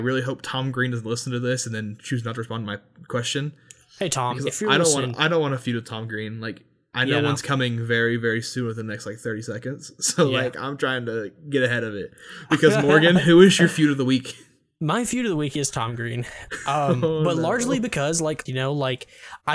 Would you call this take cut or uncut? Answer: cut